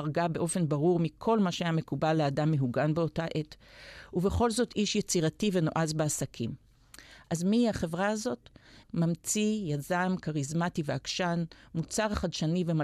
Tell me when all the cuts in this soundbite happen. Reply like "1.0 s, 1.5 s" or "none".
8.8 s